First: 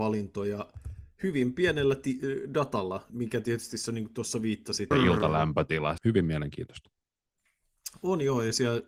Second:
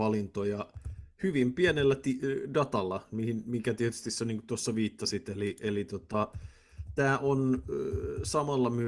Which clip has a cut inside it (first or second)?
first